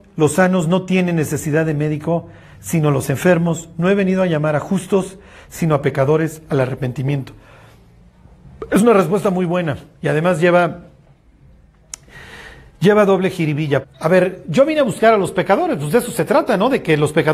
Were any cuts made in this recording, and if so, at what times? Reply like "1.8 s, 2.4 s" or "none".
13.8 s